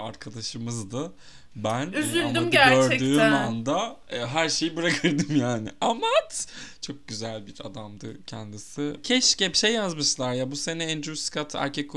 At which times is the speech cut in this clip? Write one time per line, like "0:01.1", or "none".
none